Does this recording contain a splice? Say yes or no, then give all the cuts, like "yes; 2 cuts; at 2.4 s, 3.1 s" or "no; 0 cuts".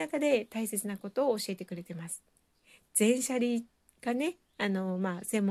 no; 0 cuts